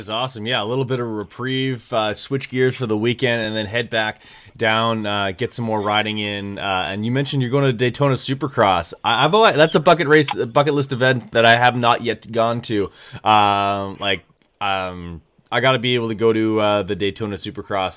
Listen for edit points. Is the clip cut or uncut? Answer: uncut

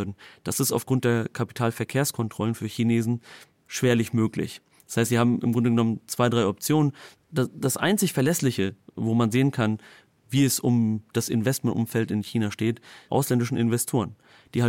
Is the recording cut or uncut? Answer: cut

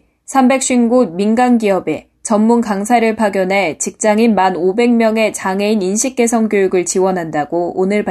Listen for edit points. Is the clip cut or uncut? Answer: uncut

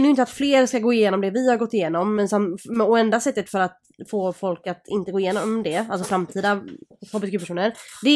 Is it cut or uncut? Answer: uncut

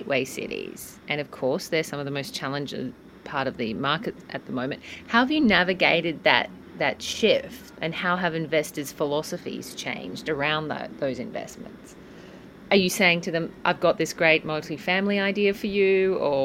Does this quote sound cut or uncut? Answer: uncut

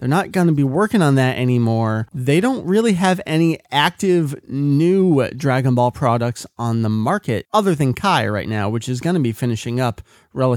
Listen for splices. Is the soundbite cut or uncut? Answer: uncut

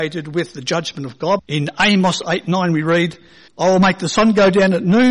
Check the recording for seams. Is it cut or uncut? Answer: cut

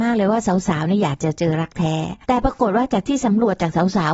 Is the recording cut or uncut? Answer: cut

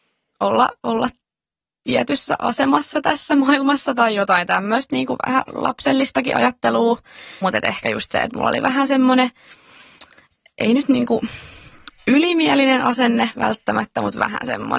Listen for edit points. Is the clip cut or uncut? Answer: cut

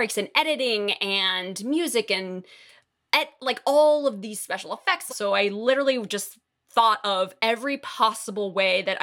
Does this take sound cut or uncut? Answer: cut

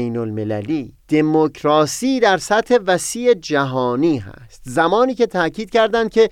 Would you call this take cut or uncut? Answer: cut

